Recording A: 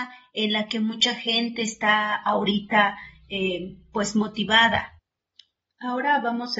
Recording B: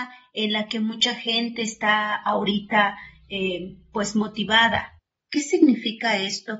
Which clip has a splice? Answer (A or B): B